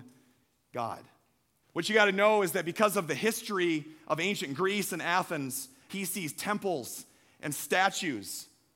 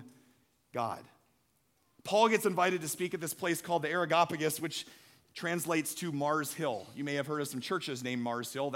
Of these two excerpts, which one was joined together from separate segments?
first; 2 cuts; at 1.6 s, 5.9 s

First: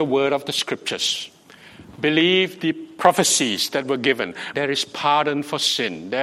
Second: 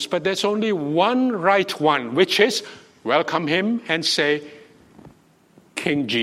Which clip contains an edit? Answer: first; 1 cut; at 4.5 s

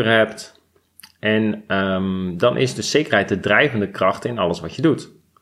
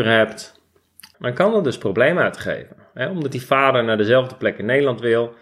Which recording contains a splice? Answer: second; 1 cut; at 1.1 s

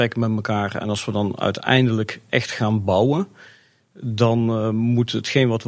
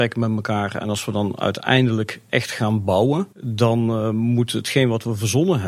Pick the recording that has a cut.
second; 1 cut; at 3.3 s

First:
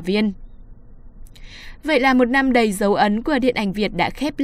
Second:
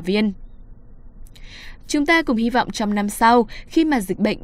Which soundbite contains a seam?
second; 1 cut; at 1.8 s

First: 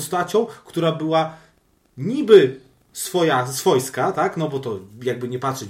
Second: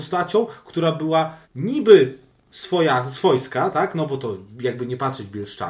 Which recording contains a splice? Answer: second; 1 cut; at 1.4 s

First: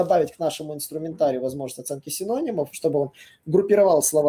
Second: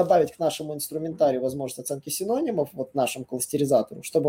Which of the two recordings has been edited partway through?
first; 1 cut; at 2.7 s

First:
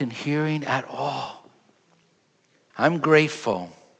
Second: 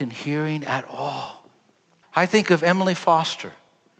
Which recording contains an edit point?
second; 1 cut; at 2.0 s

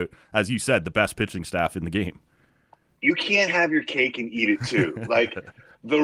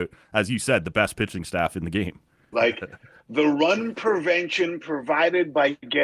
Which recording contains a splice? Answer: second; 1 cut; at 2.5 s

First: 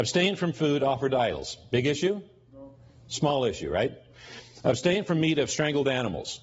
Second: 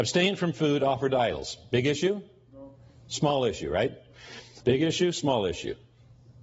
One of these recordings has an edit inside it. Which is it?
second; 1 cut; at 4.6 s

